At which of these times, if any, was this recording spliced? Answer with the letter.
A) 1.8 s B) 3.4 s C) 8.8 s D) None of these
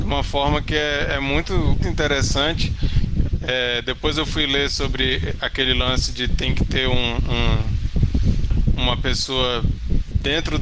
A